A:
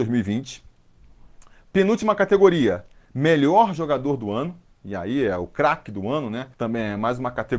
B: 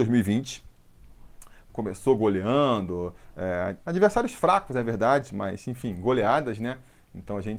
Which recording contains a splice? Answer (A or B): B